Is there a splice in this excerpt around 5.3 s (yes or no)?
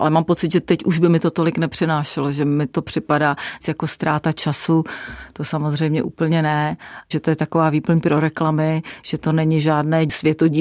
no